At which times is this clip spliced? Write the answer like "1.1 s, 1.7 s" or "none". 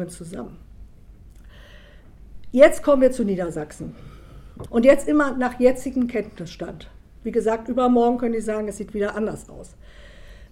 4.7 s

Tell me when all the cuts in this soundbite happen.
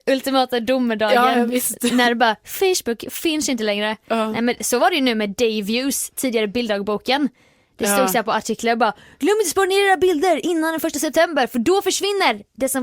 none

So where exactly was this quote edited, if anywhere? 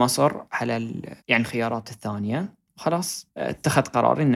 1.2 s

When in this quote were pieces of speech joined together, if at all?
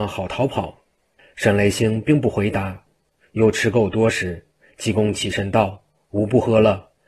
none

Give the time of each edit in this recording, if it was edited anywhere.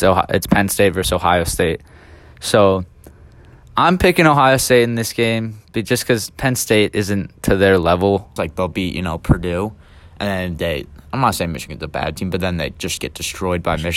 8.4 s

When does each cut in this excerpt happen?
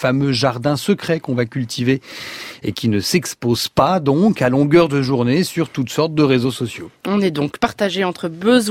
none

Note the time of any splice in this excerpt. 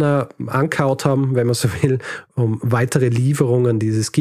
none

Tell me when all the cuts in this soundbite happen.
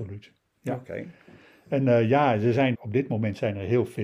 2.7 s

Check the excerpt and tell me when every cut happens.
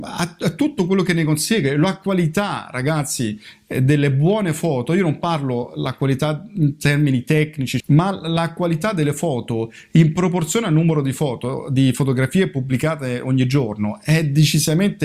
7.8 s

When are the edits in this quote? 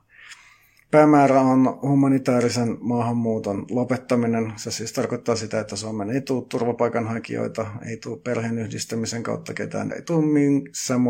9.9 s

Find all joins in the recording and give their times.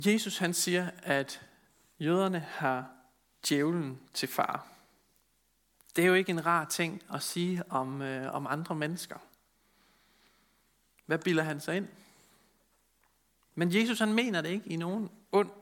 none

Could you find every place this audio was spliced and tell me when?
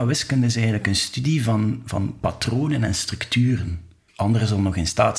4.1 s

